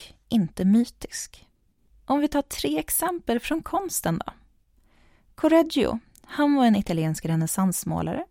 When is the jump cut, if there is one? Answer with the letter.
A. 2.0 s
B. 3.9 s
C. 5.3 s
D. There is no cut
D